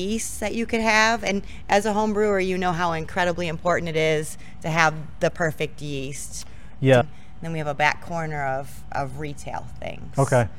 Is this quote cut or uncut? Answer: cut